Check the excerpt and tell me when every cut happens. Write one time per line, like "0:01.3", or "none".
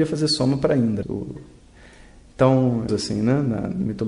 0:01.0
0:02.9